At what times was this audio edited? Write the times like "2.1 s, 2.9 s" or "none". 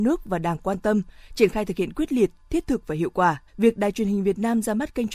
3.5 s